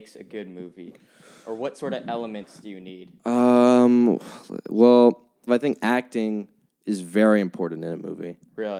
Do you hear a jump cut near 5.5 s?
yes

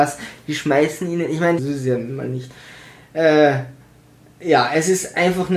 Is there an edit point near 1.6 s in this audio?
yes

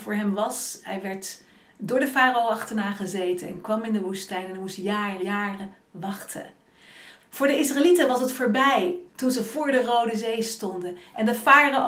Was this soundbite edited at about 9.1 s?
yes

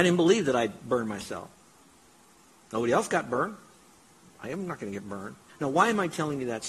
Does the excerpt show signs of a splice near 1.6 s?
no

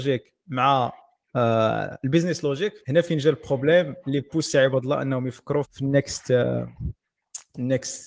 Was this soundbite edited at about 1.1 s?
no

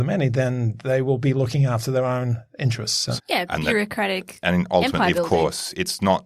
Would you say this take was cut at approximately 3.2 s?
yes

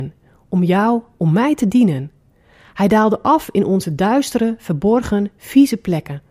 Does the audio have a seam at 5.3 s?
no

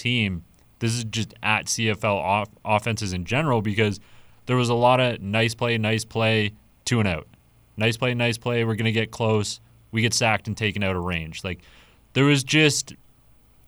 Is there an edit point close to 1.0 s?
no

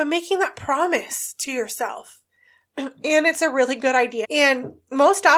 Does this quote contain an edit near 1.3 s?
no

